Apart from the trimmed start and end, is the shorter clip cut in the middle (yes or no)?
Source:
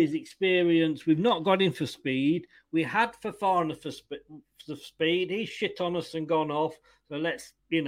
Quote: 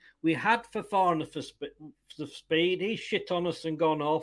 no